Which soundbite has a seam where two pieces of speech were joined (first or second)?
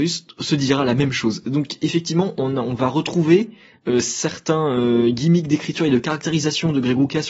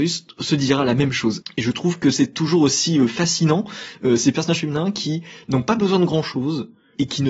second